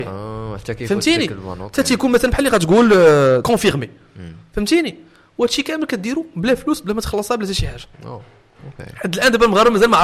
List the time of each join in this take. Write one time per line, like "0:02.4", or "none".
0:03.4
0:07.9